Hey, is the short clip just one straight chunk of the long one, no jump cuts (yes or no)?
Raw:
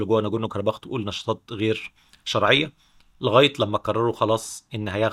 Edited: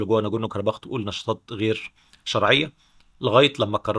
yes